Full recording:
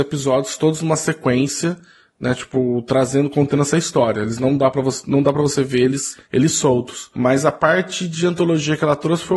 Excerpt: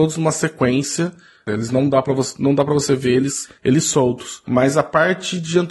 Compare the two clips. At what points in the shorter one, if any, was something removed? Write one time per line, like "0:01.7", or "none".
0:01.5